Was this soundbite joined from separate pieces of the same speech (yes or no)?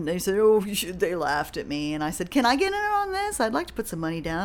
no